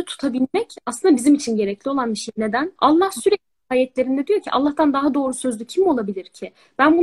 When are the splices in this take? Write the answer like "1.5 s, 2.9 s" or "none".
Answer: 2.8 s